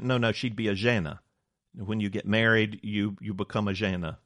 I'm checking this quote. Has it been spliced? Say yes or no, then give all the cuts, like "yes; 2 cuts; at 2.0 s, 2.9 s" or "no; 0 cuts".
no; 0 cuts